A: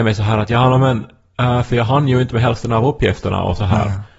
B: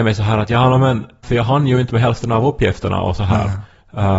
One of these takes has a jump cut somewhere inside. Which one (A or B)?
B